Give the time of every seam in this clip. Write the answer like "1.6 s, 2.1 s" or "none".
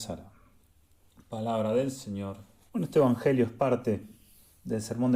2.7 s